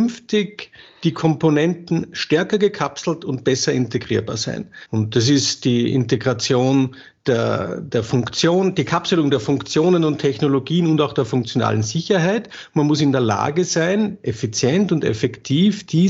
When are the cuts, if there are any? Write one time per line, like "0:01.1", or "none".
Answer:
0:04.9